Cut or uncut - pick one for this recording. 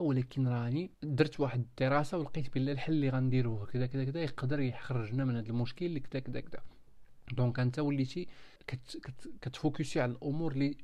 cut